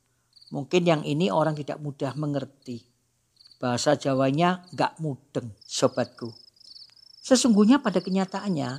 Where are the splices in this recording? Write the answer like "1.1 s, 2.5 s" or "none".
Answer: 5.6 s